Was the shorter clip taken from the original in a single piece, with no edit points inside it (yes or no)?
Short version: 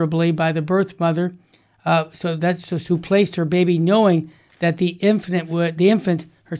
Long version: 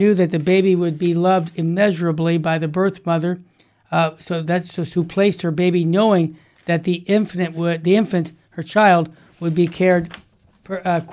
yes